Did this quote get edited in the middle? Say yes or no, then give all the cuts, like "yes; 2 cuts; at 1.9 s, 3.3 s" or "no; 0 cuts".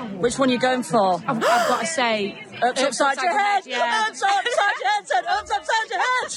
no; 0 cuts